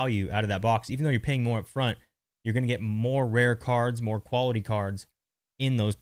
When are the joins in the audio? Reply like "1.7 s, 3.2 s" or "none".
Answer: none